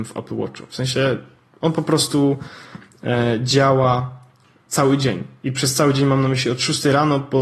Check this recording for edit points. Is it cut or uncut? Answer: uncut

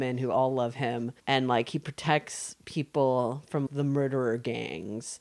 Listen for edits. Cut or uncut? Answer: cut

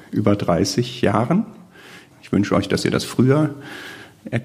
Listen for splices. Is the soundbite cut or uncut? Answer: cut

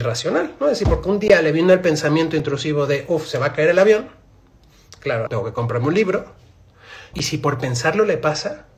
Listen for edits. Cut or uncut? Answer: cut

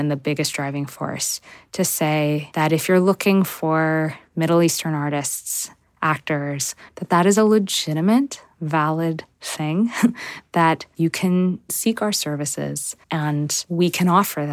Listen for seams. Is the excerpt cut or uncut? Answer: cut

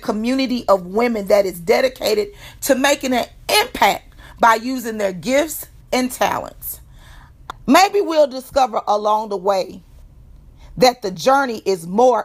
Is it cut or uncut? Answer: cut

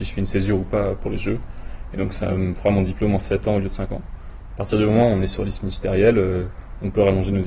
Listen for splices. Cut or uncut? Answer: cut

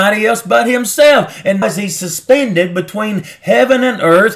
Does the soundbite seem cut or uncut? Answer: cut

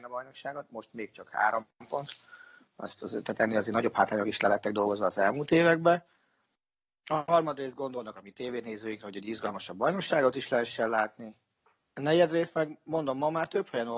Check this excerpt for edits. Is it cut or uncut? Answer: uncut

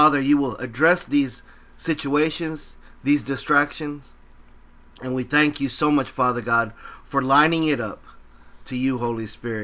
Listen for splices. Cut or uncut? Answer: uncut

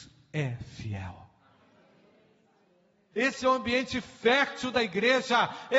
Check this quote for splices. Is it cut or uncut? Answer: cut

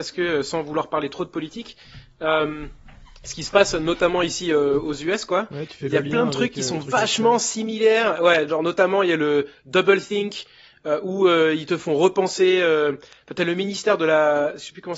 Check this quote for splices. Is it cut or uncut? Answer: uncut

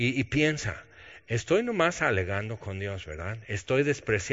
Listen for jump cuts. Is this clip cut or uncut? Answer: uncut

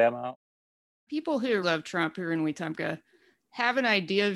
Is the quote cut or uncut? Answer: cut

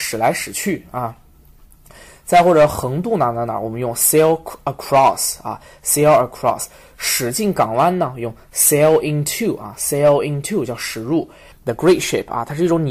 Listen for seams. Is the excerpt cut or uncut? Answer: cut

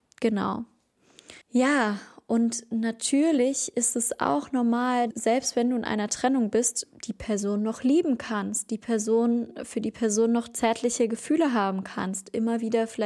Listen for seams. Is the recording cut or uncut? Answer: cut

